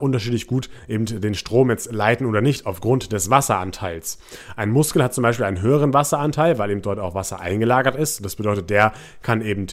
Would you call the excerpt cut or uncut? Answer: uncut